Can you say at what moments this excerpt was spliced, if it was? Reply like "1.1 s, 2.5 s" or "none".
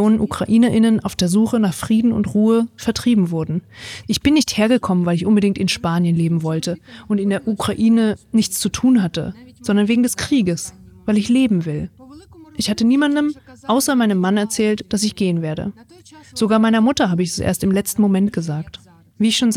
4.0 s